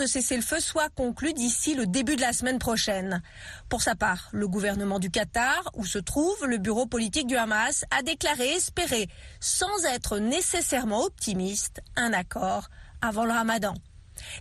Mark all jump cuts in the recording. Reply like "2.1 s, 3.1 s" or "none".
none

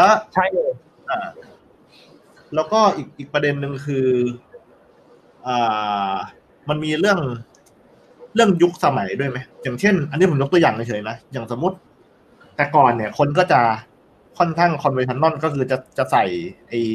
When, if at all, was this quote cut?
9.5 s

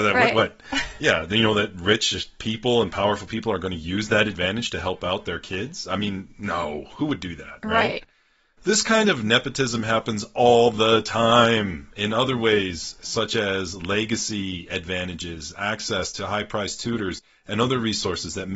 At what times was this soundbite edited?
none

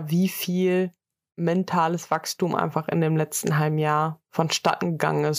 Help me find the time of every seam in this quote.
none

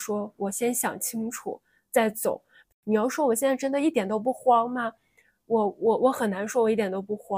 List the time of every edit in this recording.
none

